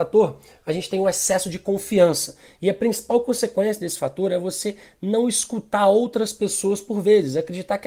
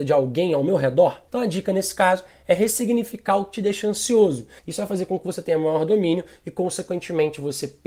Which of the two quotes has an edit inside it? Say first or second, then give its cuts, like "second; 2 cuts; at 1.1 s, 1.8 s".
second; 2 cuts; at 1.3 s, 4.6 s